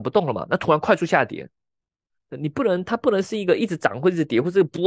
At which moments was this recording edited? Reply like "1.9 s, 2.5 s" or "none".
none

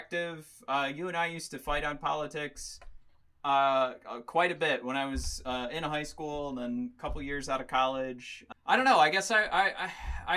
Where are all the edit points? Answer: 8.5 s

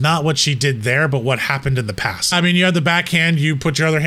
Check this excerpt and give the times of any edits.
2.3 s

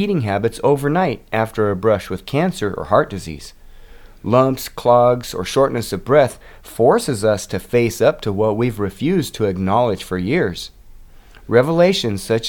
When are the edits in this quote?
none

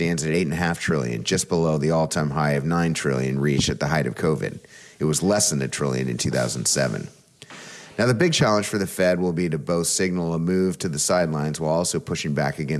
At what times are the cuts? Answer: none

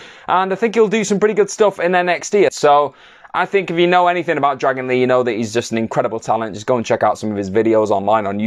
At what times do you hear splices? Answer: 2.5 s

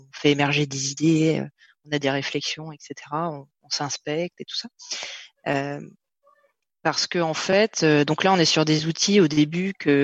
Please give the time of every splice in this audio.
none

